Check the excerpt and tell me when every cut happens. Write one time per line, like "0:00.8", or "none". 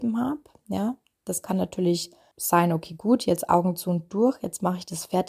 0:02.3